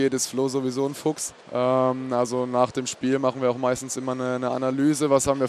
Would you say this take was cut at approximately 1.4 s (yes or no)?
yes